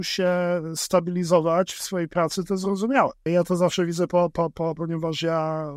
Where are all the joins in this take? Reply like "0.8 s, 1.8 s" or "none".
3.3 s, 4.8 s